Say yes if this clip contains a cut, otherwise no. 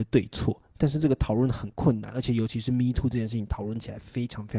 no